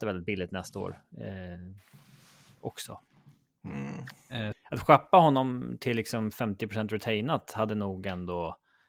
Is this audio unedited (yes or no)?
no